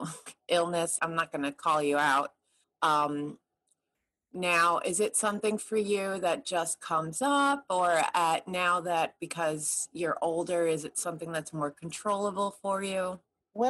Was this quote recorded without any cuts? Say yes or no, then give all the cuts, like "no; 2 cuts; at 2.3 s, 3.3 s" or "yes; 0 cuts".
no; 2 cuts; at 1.0 s, 2.6 s